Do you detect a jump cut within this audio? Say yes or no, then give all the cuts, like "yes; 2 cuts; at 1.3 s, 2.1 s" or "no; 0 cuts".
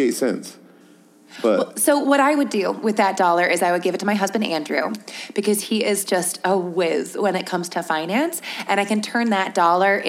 no; 0 cuts